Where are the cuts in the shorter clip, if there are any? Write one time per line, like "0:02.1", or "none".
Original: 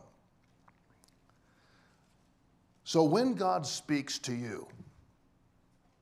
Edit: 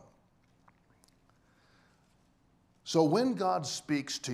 none